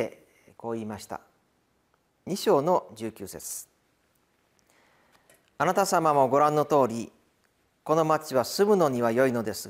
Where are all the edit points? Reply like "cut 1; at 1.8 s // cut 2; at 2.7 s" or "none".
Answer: none